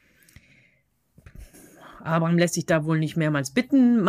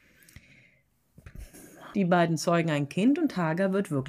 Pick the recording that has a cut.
second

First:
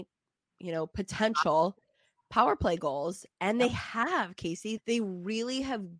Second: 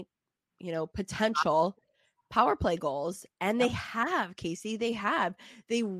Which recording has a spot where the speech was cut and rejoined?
first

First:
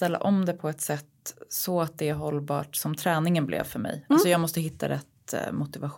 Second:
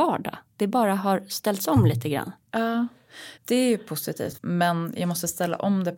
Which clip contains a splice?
second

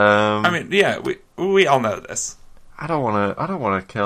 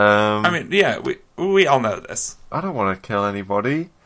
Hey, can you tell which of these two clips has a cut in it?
second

